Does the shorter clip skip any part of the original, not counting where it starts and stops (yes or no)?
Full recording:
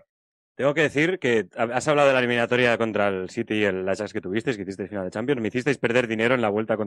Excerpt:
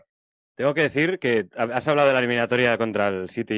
no